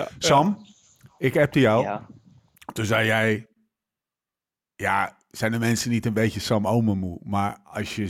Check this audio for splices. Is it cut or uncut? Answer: uncut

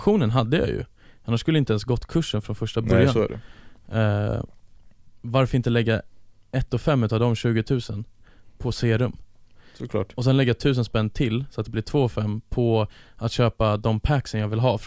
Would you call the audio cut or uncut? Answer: uncut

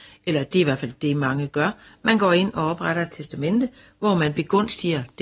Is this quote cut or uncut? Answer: uncut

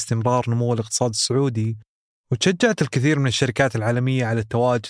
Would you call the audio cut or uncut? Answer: uncut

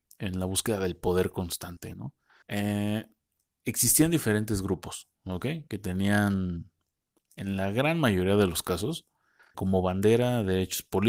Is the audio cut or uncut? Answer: cut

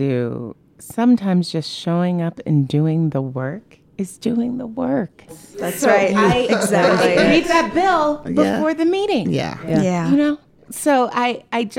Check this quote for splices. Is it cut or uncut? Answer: cut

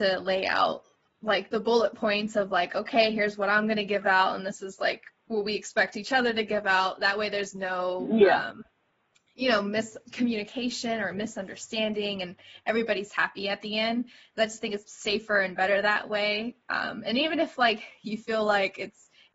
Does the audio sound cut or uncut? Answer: uncut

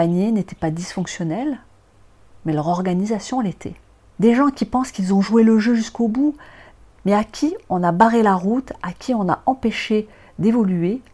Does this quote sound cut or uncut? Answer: cut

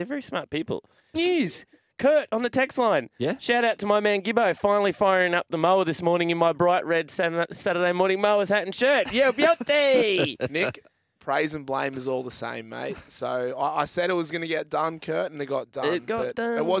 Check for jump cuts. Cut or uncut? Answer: cut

